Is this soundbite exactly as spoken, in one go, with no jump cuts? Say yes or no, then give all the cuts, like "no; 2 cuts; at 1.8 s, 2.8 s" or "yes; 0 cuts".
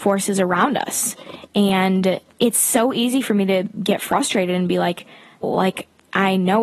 no; 1 cut; at 5.4 s